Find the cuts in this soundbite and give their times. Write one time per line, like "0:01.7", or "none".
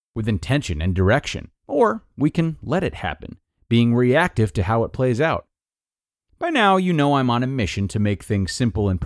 0:01.6